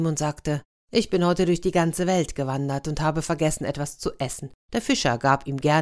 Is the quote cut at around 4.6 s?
yes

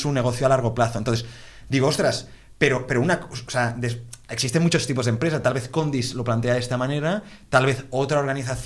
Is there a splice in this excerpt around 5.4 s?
no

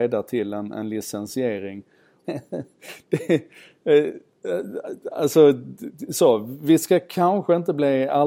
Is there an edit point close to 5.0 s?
no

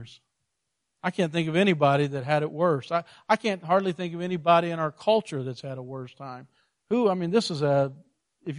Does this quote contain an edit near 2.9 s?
no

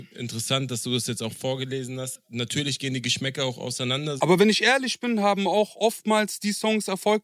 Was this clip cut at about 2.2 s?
no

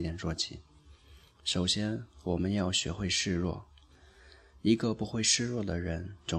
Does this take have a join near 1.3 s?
no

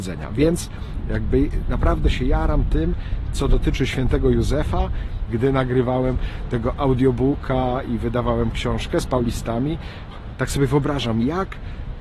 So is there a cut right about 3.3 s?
no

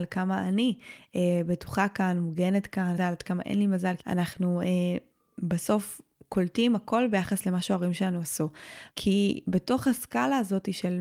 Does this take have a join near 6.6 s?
no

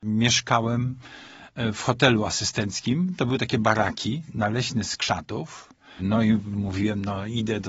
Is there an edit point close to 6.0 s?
yes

